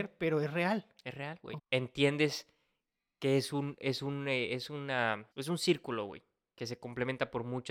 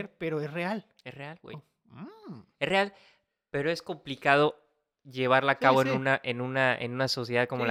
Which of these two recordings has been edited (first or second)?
first